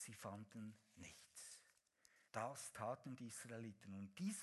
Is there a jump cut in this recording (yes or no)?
yes